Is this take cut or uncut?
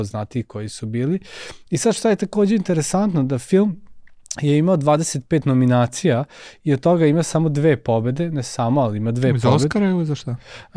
uncut